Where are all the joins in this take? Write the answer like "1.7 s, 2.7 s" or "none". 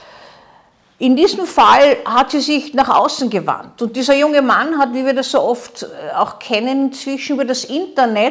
none

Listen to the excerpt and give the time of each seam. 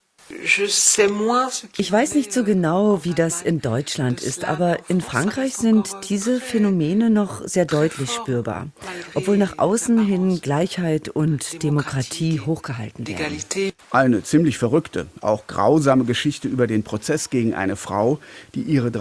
13.8 s

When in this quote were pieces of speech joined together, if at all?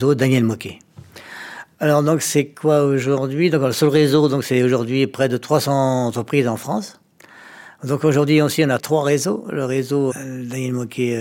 8.8 s, 10.1 s

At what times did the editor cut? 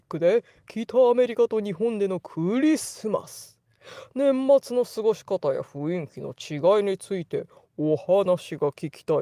none

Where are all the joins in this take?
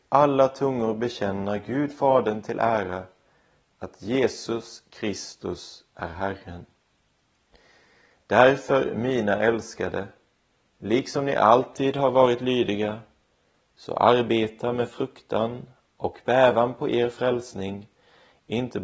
none

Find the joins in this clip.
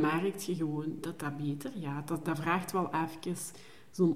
none

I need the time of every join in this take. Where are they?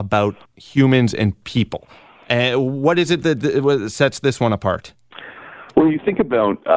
none

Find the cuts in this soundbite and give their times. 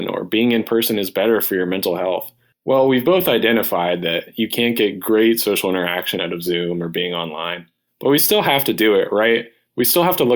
2.5 s

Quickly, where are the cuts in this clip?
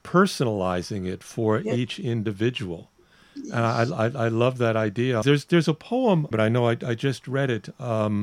5.2 s, 6.3 s

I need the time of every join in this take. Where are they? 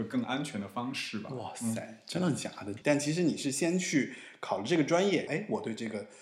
2.8 s, 5.3 s

